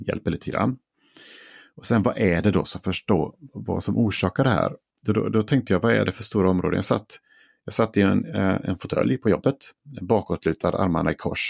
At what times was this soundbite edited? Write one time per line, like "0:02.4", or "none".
none

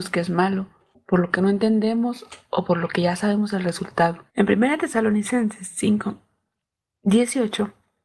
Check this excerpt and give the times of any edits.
0:04.3

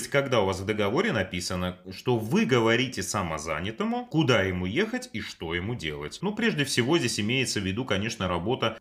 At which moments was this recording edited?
0:06.2

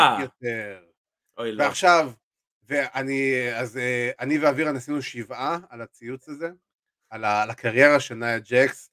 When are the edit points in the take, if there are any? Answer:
none

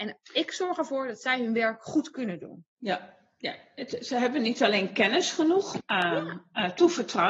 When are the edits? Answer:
0:05.8

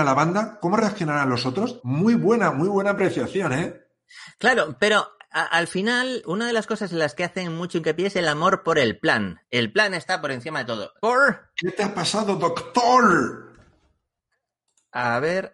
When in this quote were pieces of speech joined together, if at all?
0:01.8
0:06.2
0:11.0

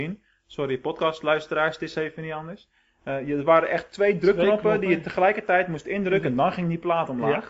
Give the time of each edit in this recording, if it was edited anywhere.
none

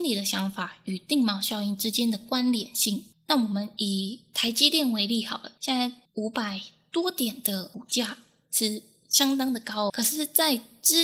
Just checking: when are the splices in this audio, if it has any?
0:05.6
0:09.9

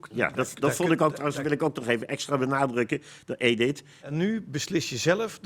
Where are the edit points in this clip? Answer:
0:04.0

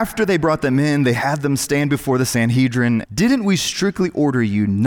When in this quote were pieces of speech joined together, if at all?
0:03.0

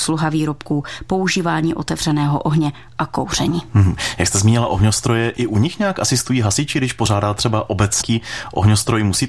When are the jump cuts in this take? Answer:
0:08.0

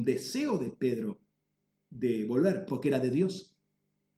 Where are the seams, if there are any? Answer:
0:02.7

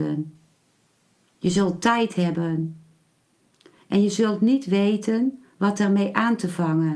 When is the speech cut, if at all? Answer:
0:01.3

